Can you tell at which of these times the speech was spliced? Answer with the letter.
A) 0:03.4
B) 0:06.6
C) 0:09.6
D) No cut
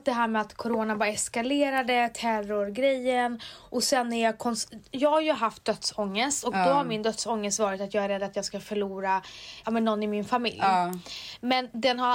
C